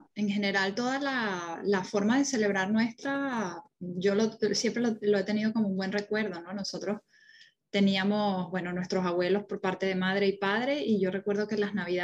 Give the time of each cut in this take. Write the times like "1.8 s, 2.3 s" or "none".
none